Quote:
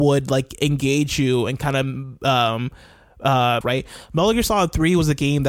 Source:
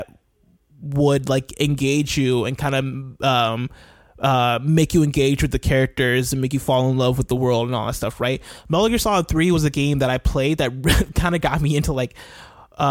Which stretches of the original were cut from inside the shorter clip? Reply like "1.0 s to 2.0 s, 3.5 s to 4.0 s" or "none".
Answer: 4.6 s to 8.2 s